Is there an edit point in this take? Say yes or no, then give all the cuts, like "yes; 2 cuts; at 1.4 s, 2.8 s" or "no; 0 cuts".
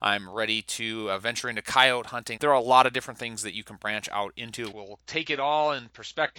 yes; 2 cuts; at 2.4 s, 4.7 s